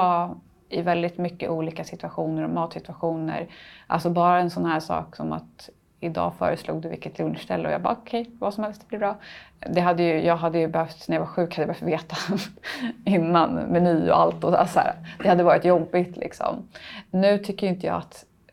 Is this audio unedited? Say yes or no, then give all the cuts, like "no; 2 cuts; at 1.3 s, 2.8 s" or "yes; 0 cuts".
yes; 0 cuts